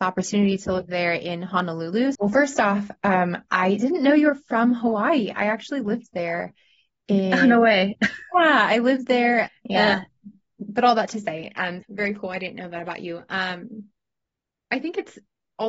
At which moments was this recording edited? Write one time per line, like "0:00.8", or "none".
0:02.2
0:09.5
0:11.8